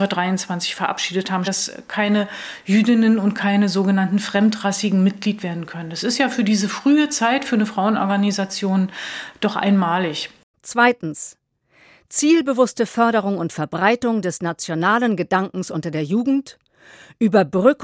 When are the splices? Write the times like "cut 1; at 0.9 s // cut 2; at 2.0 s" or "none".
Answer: cut 1; at 1.4 s // cut 2; at 10.5 s